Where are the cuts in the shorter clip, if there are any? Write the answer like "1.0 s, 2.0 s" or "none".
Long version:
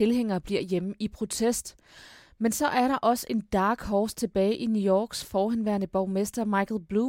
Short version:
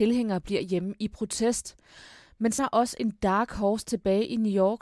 2.6 s